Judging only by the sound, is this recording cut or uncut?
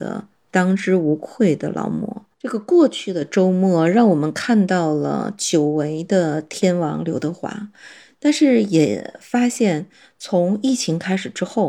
cut